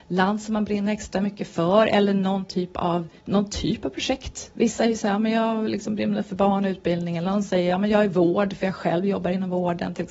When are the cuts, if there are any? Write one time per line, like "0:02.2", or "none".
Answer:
0:03.2